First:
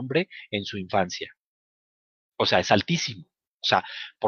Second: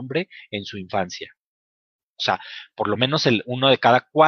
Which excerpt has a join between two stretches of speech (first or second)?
second